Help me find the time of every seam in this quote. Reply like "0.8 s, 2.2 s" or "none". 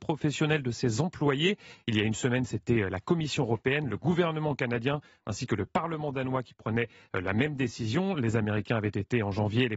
none